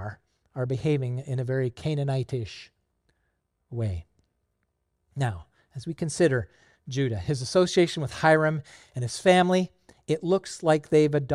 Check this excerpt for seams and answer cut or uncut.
uncut